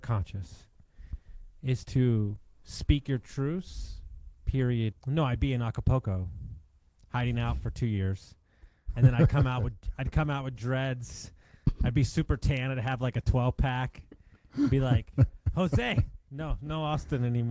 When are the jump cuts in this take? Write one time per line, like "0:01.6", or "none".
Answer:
0:04.9